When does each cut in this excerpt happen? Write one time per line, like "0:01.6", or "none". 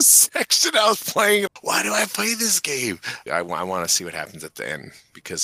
0:01.5
0:03.3